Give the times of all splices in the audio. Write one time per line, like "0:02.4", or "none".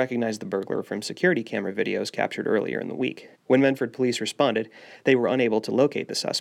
0:03.3